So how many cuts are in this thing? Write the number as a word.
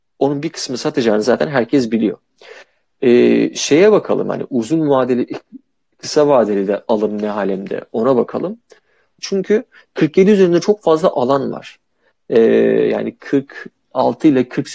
one